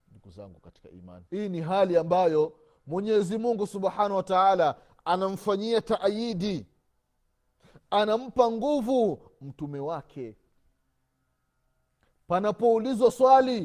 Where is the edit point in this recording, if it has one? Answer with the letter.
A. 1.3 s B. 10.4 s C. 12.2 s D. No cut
A